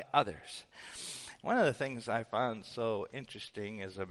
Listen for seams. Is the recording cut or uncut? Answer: cut